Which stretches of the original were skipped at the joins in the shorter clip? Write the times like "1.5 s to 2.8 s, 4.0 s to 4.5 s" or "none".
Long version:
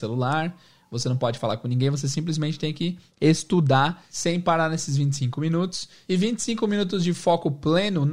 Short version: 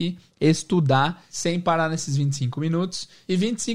none